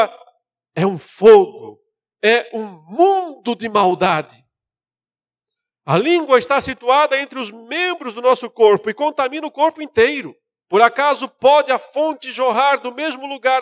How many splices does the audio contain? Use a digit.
1